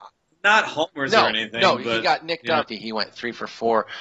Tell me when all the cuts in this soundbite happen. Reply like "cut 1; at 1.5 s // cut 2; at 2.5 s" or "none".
cut 1; at 2.7 s